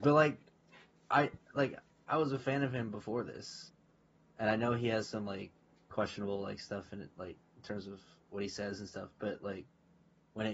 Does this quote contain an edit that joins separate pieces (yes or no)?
yes